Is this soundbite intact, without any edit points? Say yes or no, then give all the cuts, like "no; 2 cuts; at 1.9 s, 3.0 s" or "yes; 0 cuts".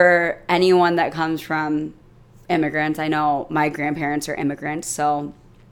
yes; 0 cuts